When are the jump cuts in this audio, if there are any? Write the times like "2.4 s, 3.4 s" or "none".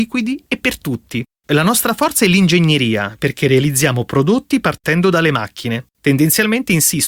1.3 s, 5.9 s